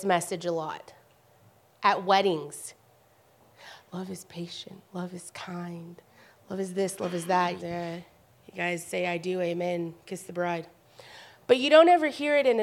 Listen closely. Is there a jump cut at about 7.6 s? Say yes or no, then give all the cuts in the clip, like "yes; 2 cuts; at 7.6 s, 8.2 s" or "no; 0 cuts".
yes; 1 cut; at 7.6 s